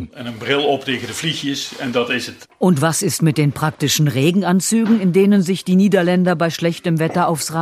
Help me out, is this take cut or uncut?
uncut